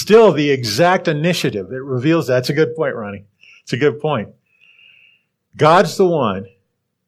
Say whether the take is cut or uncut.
uncut